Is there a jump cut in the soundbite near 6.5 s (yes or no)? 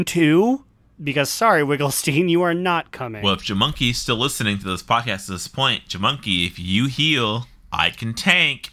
no